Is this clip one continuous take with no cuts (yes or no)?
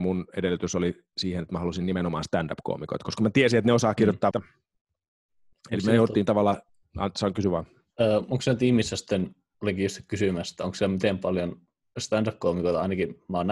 no